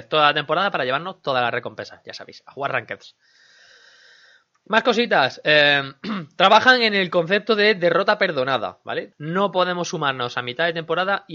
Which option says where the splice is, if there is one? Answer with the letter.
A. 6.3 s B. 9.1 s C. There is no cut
B